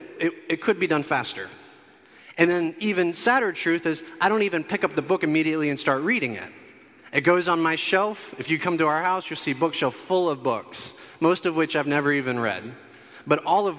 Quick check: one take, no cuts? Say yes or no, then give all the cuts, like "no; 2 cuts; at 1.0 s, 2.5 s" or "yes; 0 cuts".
yes; 0 cuts